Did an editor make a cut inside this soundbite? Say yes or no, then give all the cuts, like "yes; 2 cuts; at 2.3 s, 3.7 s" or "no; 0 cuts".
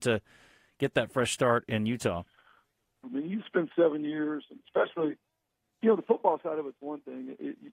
yes; 1 cut; at 3.0 s